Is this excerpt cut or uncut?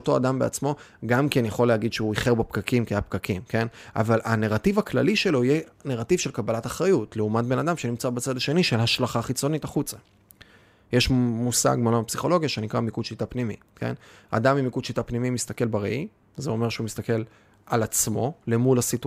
uncut